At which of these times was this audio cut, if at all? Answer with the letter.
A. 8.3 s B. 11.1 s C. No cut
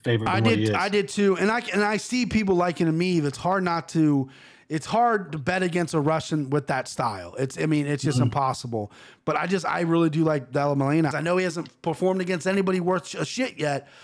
B